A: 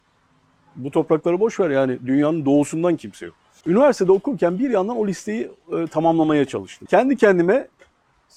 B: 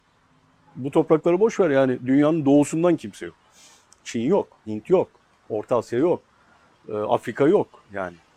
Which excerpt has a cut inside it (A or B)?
A